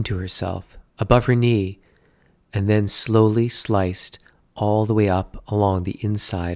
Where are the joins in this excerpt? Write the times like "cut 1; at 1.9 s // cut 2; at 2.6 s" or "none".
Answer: none

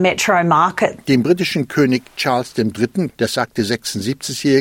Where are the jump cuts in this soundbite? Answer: cut 1; at 1.0 s // cut 2; at 3.1 s

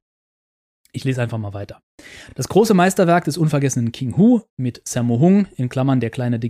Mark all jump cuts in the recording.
none

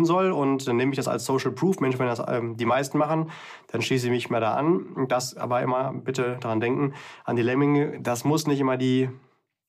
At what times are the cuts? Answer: none

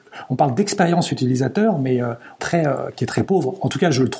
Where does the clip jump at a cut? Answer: cut 1; at 2.4 s

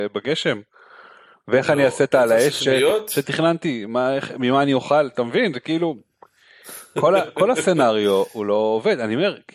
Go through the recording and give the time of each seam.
none

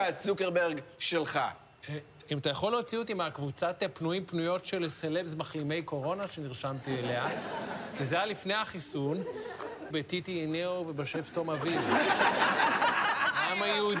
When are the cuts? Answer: cut 1; at 2.2 s // cut 2; at 9.9 s

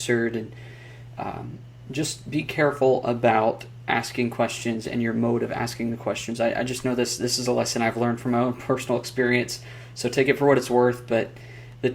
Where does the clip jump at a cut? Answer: none

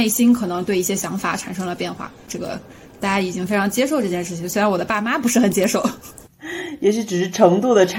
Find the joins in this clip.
cut 1; at 2.3 s

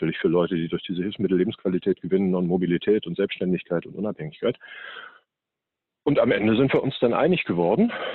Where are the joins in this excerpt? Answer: none

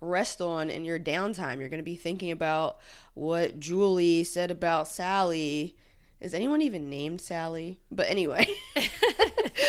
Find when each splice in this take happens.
none

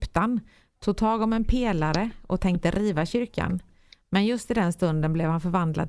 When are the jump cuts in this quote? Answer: none

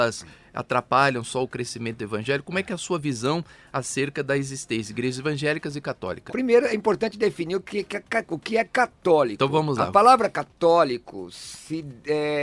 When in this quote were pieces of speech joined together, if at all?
cut 1; at 6.3 s

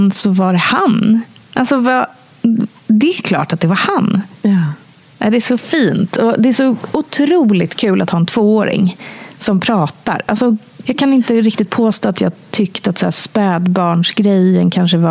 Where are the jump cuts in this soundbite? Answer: cut 1; at 10.8 s

